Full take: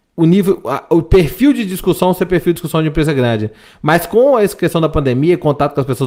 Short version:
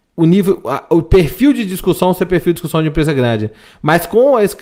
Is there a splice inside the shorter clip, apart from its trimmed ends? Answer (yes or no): no